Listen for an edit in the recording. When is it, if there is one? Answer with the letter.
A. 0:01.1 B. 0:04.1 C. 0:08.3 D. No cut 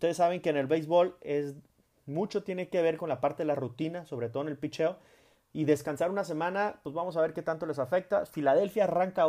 D